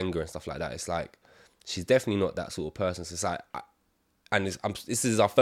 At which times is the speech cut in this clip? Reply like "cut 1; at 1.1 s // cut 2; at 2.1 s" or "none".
none